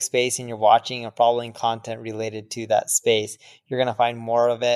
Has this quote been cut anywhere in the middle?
no; 0 cuts

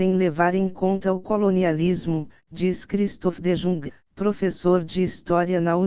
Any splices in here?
no; 0 cuts

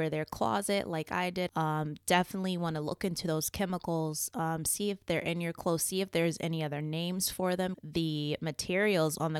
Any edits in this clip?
yes; 2 cuts; at 1.5 s, 7.7 s

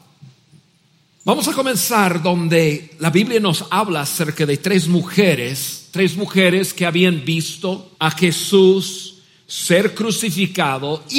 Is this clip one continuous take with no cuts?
no; 2 cuts; at 1.1 s, 7.9 s

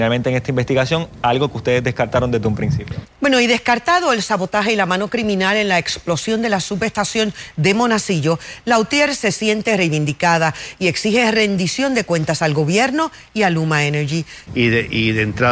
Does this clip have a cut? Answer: yes; 2 cuts; at 3.0 s, 14.5 s

